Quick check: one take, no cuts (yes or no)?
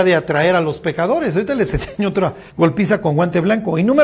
no